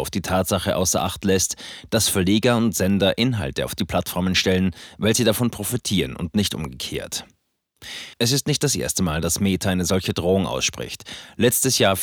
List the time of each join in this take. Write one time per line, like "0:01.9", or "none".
0:08.2